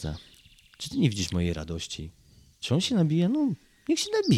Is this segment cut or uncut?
uncut